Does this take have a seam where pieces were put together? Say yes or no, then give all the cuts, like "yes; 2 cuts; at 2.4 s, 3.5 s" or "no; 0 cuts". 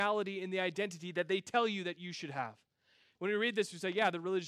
yes; 1 cut; at 3.1 s